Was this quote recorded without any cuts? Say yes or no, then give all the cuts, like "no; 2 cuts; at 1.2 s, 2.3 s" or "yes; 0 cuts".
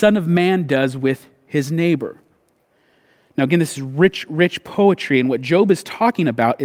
yes; 0 cuts